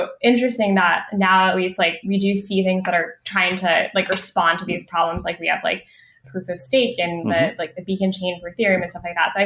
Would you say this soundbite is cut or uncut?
cut